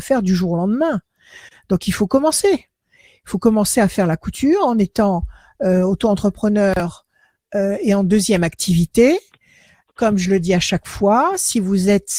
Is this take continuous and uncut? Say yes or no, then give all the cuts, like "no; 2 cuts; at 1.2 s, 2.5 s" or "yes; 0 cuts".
yes; 0 cuts